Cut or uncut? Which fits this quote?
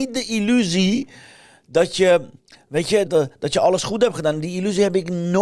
cut